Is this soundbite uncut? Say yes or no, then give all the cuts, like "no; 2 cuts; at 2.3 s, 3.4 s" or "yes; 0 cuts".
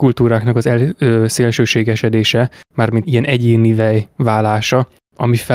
no; 1 cut; at 3.0 s